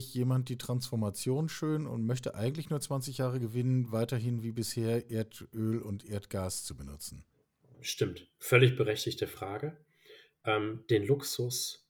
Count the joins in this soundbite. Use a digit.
0